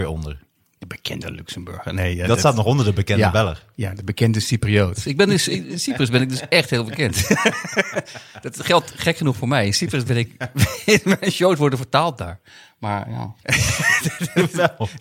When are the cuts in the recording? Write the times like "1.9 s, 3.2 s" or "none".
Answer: 13.4 s

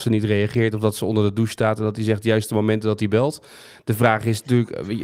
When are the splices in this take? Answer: none

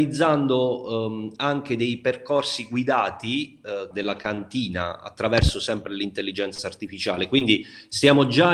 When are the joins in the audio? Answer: 3.9 s

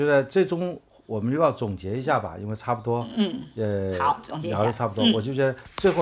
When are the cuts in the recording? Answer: none

